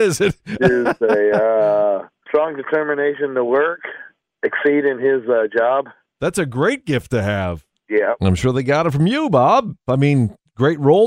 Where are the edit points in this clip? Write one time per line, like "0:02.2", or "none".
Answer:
0:02.3

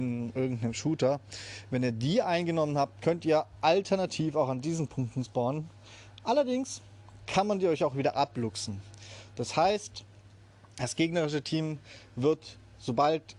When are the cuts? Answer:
none

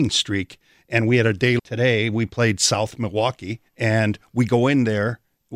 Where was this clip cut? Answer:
0:01.6
0:03.7

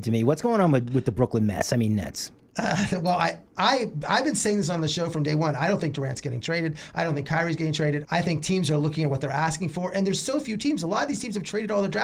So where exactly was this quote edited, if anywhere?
0:08.0

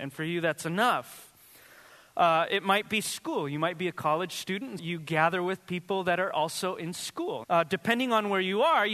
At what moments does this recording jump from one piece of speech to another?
0:04.8
0:07.4

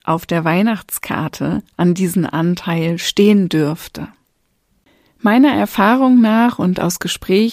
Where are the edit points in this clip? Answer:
none

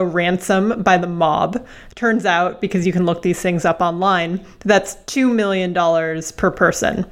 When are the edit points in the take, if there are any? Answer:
none

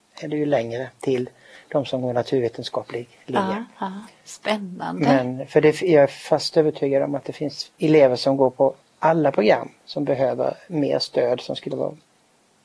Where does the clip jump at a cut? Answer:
none

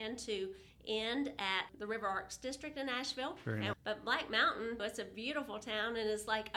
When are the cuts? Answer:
0:01.7
0:03.7
0:04.8

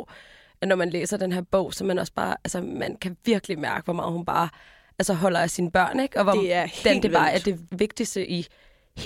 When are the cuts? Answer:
none

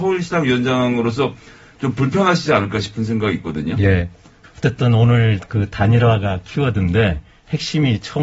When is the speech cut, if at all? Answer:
0:04.4

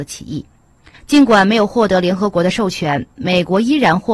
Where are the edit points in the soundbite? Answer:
0:00.9

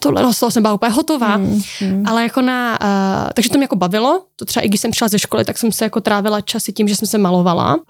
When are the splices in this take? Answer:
none

